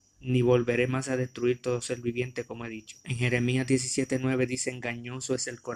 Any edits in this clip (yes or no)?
yes